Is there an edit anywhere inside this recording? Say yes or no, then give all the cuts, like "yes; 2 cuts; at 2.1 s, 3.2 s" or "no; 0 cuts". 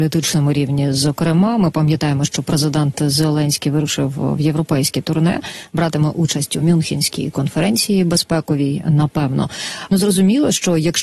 yes; 1 cut; at 9.9 s